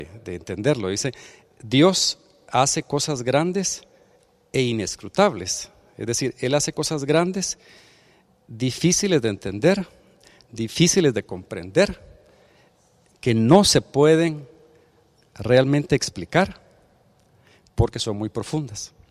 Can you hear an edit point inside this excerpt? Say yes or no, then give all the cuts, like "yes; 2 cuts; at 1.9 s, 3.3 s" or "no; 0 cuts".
no; 0 cuts